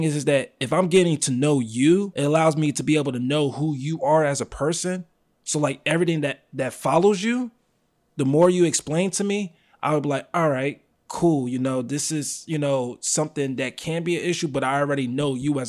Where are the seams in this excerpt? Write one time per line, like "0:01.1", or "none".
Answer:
none

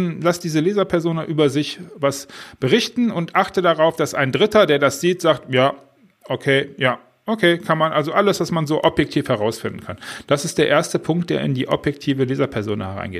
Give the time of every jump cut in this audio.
none

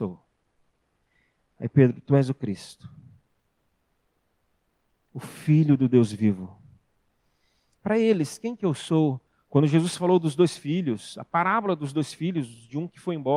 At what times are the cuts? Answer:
0:07.8
0:09.4

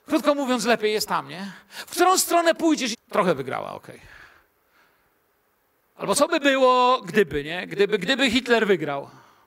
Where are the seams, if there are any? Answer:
0:02.9

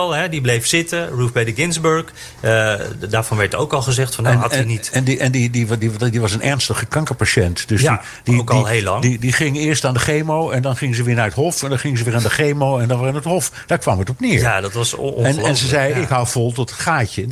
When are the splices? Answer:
none

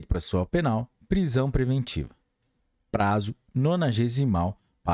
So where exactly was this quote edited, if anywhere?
0:02.9

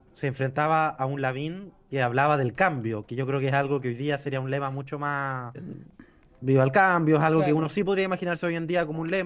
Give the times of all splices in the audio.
0:05.5

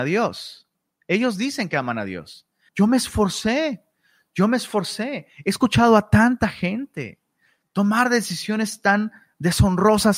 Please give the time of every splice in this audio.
0:02.7

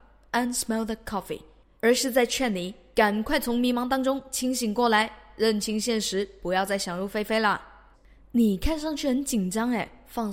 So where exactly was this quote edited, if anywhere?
0:01.8
0:07.9

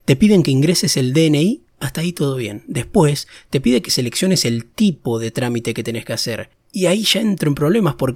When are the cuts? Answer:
none

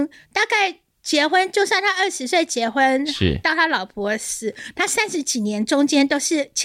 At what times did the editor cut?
none

